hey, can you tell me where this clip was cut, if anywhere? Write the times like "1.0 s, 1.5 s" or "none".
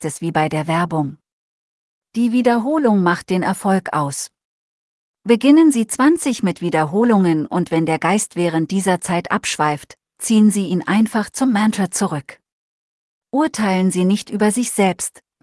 none